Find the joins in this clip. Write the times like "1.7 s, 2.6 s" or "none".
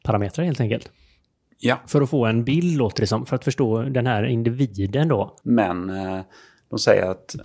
5.4 s

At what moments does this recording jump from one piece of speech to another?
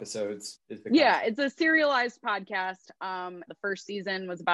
3.5 s

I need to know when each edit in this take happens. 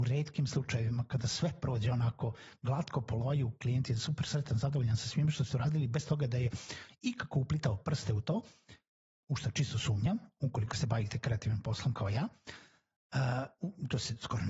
none

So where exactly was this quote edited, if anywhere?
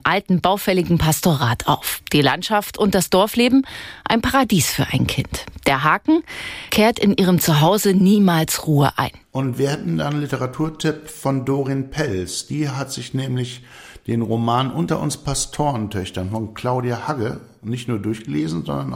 6.7 s, 9.2 s

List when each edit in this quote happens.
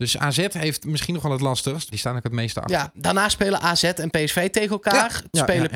1.9 s

